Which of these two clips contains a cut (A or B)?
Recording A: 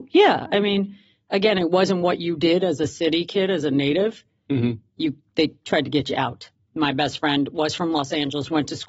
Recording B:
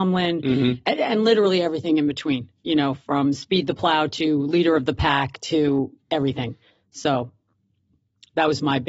A